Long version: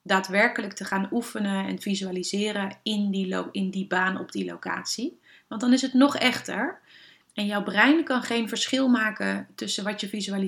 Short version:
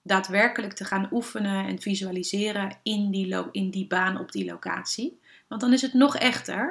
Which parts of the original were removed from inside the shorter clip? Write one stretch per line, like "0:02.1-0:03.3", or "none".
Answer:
none

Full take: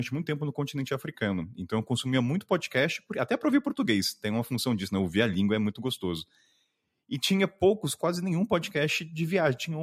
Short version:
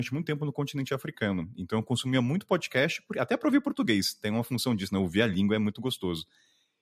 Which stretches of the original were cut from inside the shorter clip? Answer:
none

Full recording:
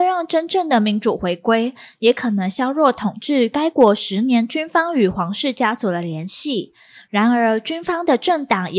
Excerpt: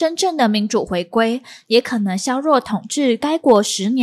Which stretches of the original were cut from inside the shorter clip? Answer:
none

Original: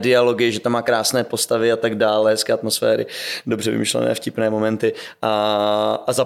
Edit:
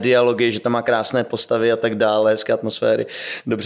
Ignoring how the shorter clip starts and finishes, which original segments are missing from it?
none

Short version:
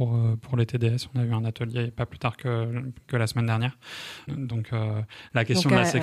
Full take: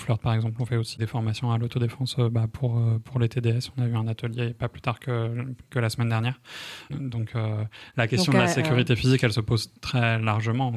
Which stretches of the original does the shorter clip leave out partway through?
none

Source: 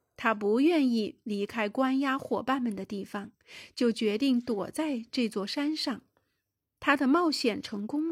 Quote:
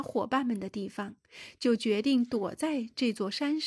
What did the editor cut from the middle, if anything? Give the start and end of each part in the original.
none

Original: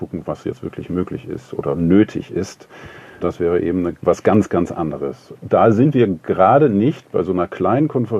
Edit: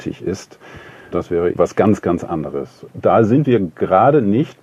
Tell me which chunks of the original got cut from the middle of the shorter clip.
0:03.6-0:04.0

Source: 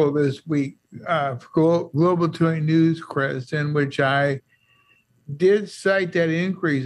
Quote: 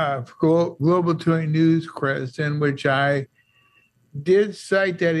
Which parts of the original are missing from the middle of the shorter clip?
none

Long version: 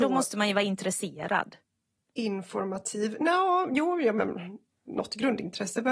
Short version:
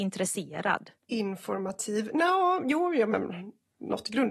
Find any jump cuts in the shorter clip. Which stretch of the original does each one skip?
0:01.6-0:02.0

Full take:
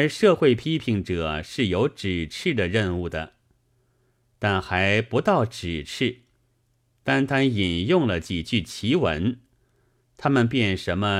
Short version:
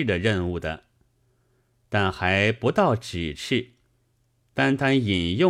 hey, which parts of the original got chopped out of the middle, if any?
none

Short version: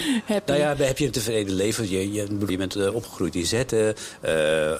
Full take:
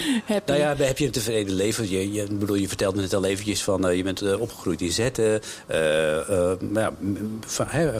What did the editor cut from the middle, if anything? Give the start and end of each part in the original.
0:02.5-0:04.0

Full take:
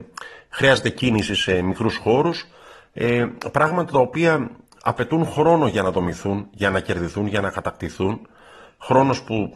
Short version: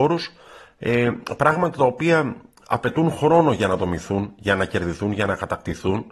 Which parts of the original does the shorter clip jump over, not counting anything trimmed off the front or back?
none

